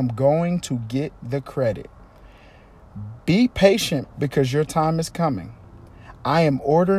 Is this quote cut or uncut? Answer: cut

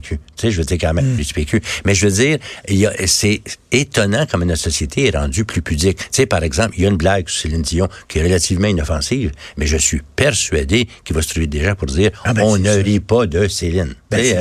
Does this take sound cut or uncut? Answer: cut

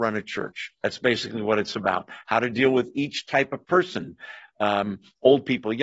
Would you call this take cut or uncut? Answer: uncut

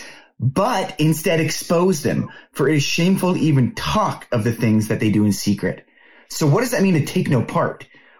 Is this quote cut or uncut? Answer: uncut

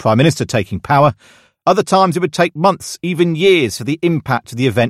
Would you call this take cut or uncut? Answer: uncut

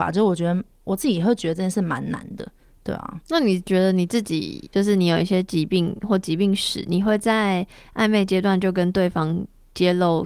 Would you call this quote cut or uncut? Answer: uncut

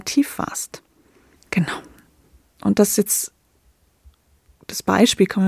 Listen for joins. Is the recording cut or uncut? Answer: cut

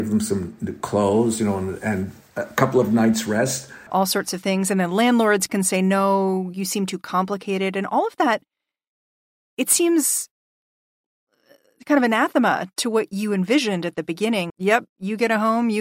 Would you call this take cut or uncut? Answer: cut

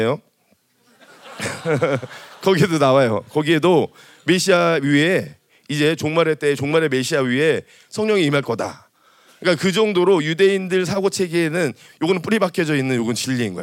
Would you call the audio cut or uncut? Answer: uncut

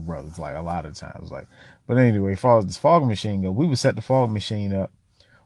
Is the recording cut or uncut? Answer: uncut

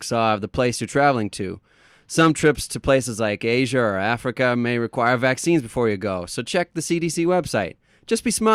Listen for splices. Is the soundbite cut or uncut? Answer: uncut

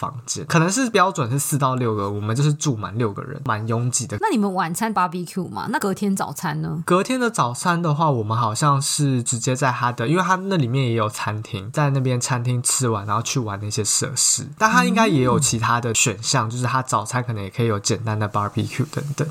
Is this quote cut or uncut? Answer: cut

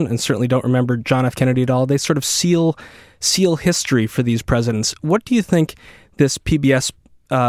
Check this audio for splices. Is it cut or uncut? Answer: uncut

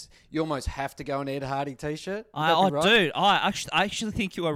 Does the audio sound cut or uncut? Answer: uncut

